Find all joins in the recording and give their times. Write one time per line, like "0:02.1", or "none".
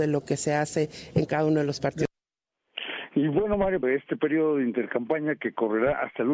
0:03.8

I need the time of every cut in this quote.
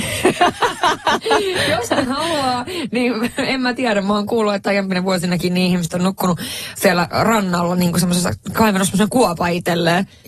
none

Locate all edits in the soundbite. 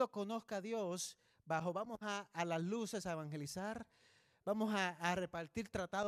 none

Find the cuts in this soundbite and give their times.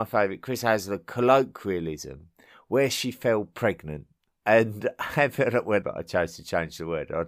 0:04.3
0:05.8

